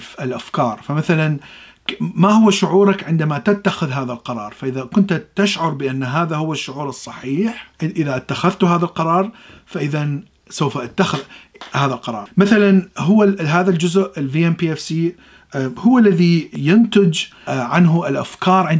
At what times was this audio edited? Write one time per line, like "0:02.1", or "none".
0:07.7